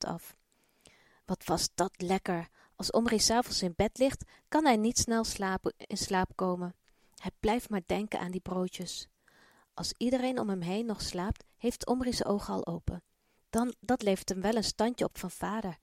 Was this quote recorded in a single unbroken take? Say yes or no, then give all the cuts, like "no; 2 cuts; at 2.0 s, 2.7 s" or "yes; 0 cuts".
no; 1 cut; at 13.4 s